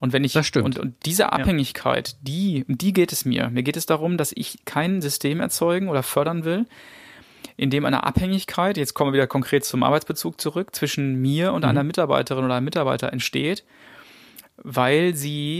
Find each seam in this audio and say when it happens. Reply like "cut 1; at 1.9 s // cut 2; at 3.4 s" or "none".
none